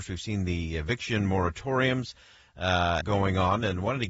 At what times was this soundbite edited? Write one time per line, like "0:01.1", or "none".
0:03.0